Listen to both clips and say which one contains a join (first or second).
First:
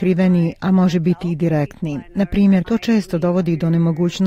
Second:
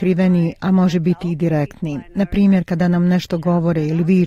first